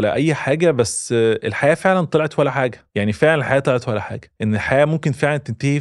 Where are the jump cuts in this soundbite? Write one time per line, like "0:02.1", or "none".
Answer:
0:02.9
0:04.4